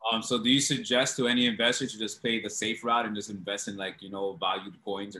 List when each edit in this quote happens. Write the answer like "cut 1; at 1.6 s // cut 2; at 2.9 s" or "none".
none